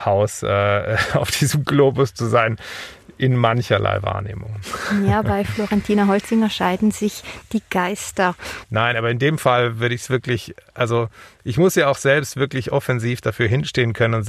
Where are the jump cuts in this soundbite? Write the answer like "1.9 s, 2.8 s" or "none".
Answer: 8.6 s

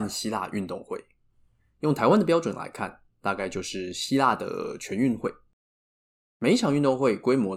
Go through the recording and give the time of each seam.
none

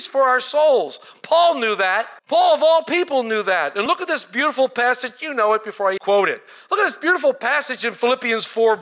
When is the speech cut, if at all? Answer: 2.2 s, 6.0 s

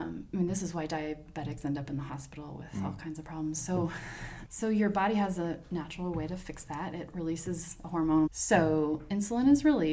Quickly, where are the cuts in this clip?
4.4 s, 8.3 s

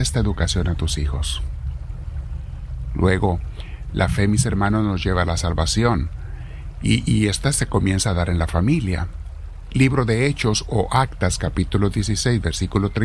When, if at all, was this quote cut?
none

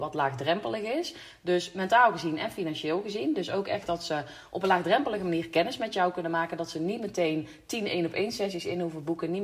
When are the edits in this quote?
none

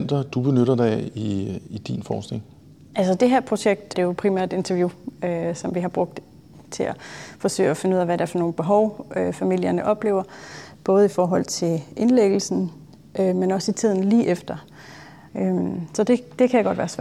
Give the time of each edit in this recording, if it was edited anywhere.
3.9 s, 15.3 s

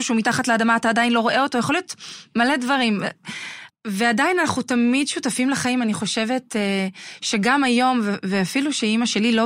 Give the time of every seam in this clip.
3.7 s

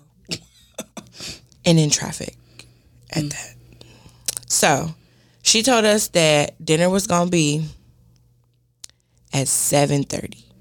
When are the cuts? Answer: none

